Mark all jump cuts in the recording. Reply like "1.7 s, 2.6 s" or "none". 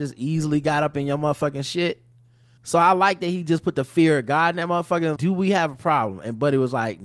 2.6 s, 5.2 s